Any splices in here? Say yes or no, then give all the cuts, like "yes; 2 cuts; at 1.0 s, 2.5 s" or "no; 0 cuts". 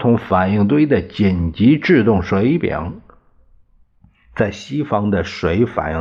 no; 0 cuts